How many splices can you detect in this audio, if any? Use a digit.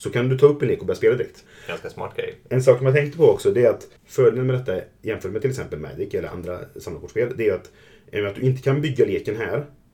2